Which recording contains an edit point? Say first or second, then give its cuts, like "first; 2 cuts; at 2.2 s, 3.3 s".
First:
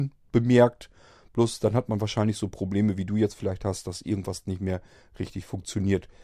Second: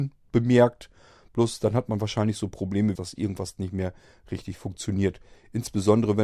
second; 1 cut; at 2.9 s